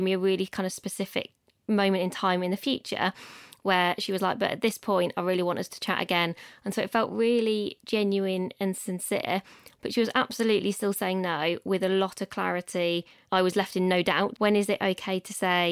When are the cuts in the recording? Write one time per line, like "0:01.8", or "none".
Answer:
0:14.4